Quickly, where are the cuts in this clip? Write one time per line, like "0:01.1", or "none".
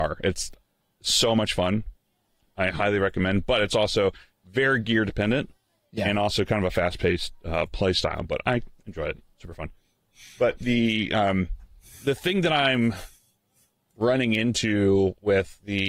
none